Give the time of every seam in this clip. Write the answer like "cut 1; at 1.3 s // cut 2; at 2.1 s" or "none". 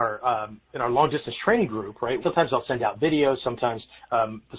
cut 1; at 2.2 s